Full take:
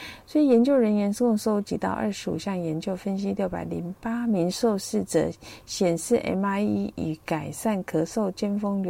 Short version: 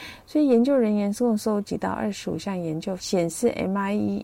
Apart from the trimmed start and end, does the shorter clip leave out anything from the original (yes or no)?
yes